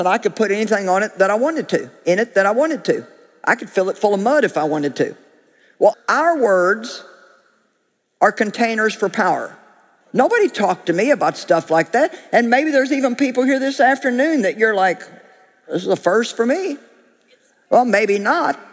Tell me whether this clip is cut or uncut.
cut